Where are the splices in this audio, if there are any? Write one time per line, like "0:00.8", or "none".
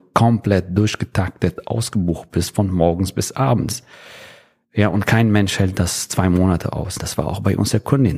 0:07.0